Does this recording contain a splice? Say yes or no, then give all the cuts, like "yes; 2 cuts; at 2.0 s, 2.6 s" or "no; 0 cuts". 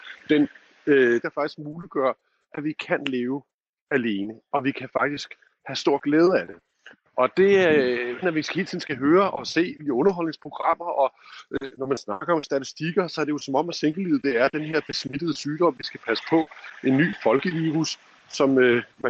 yes; 2 cuts; at 1.2 s, 8.2 s